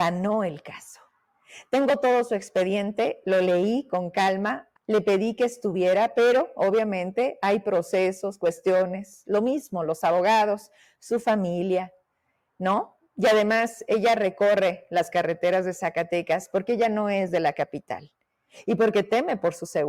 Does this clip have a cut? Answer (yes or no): yes